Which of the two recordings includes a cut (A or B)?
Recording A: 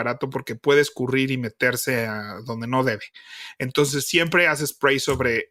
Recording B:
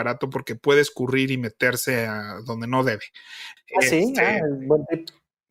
B